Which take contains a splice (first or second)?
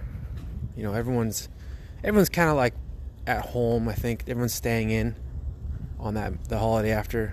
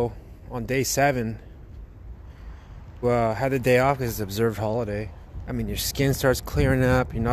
second